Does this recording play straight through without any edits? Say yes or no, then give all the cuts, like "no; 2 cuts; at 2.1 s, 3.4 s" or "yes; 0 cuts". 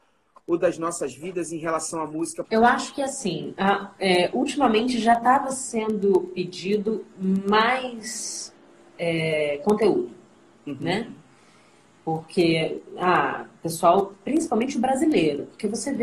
no; 1 cut; at 2.4 s